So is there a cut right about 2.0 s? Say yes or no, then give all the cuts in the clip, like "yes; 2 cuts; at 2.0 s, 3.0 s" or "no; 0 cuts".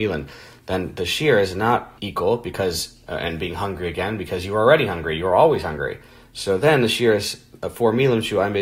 yes; 1 cut; at 2.0 s